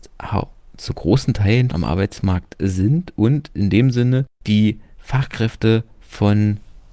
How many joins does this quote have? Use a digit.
2